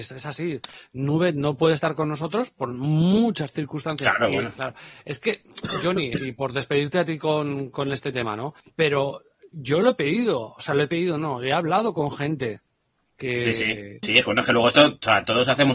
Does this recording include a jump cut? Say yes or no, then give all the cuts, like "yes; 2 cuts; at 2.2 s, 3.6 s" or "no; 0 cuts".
yes; 3 cuts; at 4.5 s, 8.6 s, 14.0 s